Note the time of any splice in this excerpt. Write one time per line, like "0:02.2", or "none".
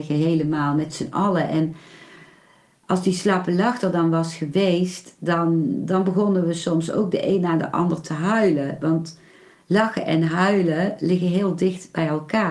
none

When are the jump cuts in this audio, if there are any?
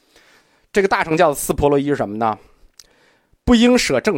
none

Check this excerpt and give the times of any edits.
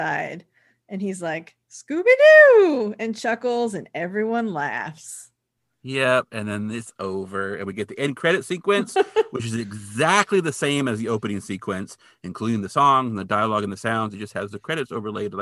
none

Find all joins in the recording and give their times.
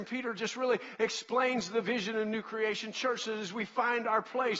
none

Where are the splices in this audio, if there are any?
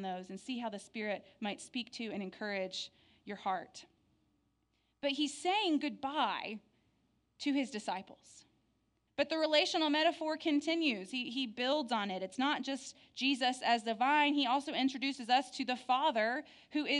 0:09.1

